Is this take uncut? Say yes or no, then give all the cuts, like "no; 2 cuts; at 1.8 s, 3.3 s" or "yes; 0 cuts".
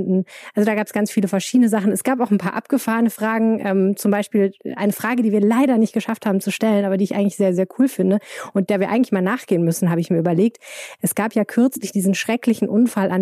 no; 1 cut; at 11.0 s